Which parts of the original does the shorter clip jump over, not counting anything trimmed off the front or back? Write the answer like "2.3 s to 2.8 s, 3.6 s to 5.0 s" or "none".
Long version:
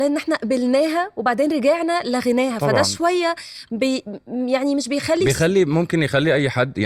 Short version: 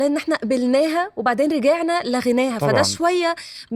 none